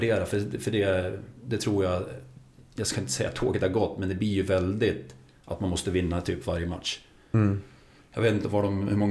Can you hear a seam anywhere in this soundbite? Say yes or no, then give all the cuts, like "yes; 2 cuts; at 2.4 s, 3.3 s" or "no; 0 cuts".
no; 0 cuts